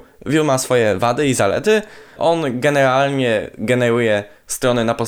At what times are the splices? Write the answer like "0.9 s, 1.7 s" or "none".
2.2 s